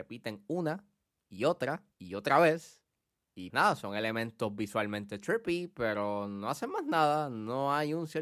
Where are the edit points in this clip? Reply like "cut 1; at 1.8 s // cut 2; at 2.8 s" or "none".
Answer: cut 1; at 1.9 s // cut 2; at 3.5 s